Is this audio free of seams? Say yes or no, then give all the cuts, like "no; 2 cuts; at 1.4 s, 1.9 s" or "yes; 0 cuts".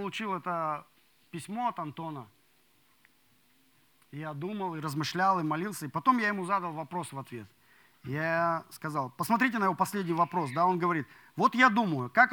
yes; 0 cuts